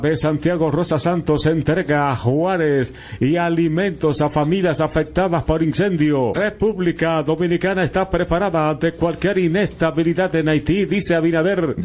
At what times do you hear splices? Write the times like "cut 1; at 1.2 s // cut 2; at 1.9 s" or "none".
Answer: cut 1; at 6.3 s